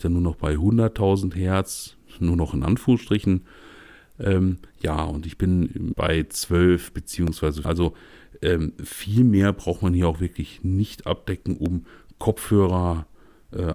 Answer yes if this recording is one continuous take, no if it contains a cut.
no